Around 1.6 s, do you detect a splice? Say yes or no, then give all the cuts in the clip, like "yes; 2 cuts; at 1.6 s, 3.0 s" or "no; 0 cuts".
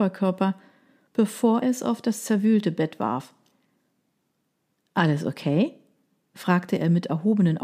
yes; 1 cut; at 1.6 s